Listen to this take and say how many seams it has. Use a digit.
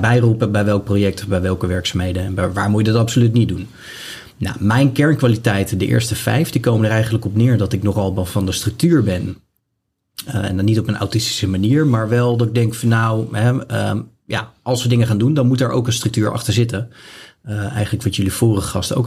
0